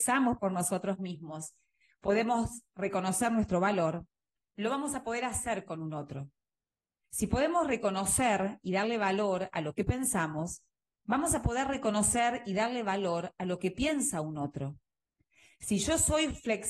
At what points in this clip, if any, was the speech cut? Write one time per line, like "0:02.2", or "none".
none